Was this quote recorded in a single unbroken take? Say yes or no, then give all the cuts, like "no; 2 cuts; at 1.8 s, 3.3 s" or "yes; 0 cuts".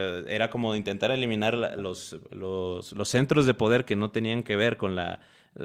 yes; 0 cuts